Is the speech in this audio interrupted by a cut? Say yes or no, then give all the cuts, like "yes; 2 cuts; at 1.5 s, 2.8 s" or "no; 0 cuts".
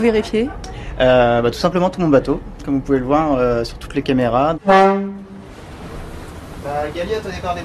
yes; 1 cut; at 4.5 s